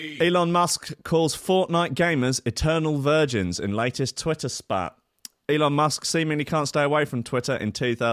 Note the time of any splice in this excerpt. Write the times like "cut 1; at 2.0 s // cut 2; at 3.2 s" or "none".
none